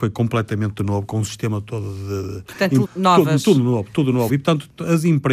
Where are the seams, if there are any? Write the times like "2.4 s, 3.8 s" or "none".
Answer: 2.8 s, 4.3 s